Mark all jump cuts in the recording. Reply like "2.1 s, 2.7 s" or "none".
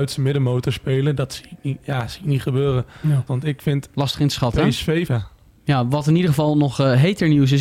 3.3 s, 5.1 s